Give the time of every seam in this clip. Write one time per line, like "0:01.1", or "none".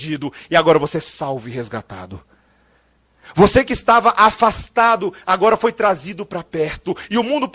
none